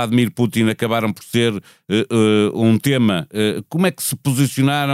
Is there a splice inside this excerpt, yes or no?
no